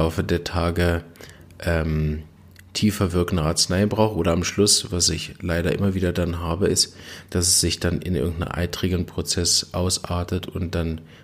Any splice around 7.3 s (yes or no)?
yes